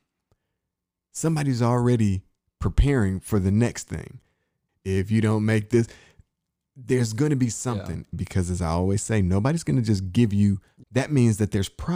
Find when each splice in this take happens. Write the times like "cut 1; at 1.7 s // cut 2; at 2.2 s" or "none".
cut 1; at 4.7 s // cut 2; at 8.1 s // cut 3; at 10.8 s